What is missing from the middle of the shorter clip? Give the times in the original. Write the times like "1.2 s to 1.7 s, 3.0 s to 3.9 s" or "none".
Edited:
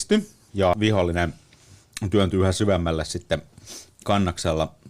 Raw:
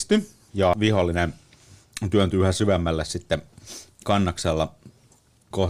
none